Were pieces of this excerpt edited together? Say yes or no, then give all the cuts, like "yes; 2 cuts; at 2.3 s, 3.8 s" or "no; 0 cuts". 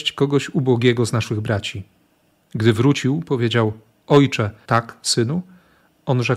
yes; 1 cut; at 4.7 s